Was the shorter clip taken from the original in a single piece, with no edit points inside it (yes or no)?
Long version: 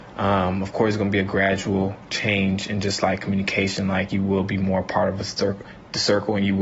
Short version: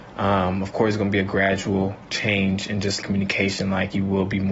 no